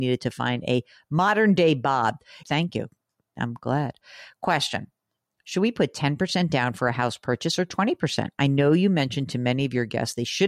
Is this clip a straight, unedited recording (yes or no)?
no